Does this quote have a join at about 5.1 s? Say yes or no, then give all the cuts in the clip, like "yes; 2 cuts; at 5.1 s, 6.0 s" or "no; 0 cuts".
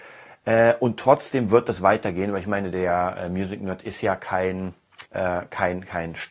yes; 1 cut; at 5.1 s